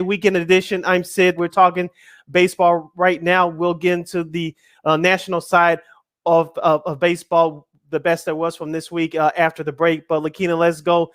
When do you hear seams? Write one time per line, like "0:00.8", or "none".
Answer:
0:01.4

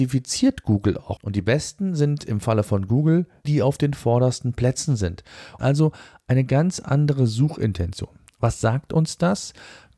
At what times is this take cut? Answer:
0:01.2
0:03.5
0:05.6

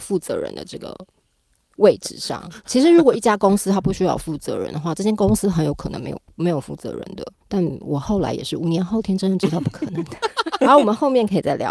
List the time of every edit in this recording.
0:07.4
0:10.6

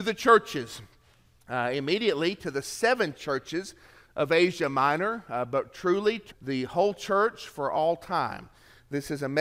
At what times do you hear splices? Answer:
0:06.3

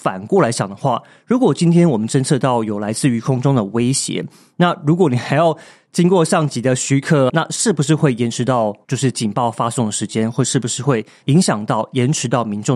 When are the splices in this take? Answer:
0:07.3

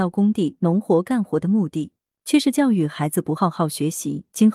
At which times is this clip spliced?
none

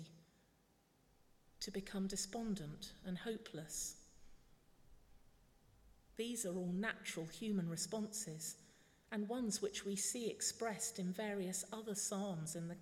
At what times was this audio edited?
none

